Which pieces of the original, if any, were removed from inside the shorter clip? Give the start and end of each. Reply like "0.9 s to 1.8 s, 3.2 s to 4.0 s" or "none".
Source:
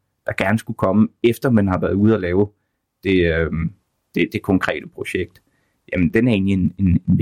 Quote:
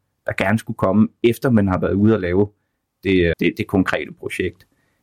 3.3 s to 4.1 s